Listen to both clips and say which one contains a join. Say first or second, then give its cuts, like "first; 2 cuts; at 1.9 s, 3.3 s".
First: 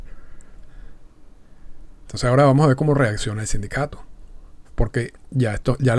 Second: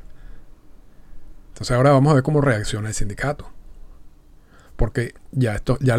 first; 1 cut; at 4.6 s